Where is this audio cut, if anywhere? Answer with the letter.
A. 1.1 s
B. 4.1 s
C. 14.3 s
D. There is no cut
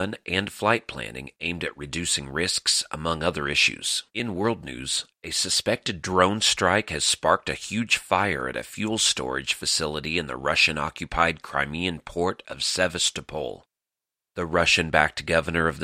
B